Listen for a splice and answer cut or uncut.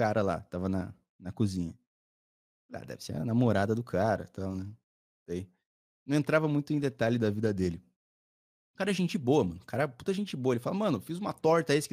uncut